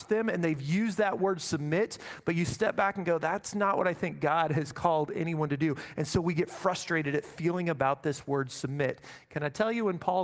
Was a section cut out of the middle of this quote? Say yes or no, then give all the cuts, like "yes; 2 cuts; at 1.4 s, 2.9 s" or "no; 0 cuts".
no; 0 cuts